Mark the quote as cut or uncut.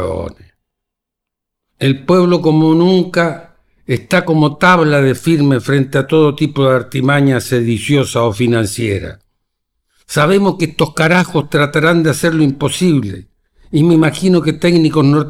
uncut